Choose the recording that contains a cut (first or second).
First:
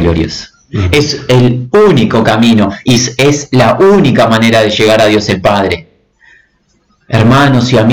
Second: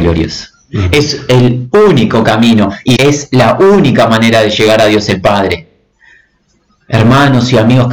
second